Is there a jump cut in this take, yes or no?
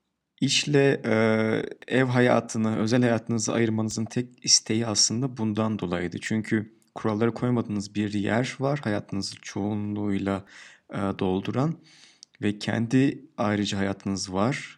no